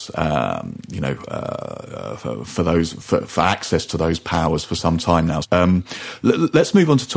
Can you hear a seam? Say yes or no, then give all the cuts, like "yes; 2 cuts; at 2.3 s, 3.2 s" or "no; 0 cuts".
yes; 1 cut; at 5.4 s